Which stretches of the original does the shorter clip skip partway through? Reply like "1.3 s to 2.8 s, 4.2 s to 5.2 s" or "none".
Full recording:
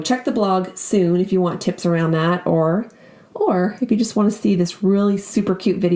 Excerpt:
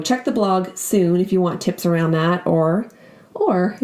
none